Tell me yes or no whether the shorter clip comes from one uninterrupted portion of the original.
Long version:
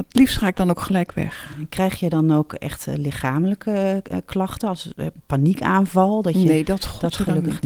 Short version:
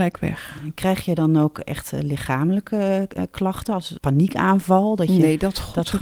no